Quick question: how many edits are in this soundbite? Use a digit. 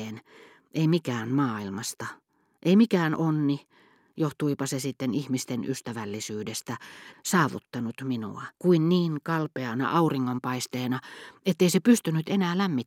2